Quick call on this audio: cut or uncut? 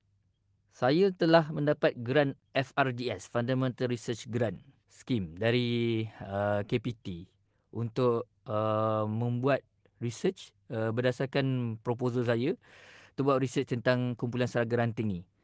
uncut